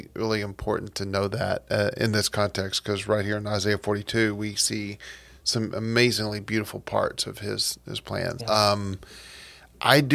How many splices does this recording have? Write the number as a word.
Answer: one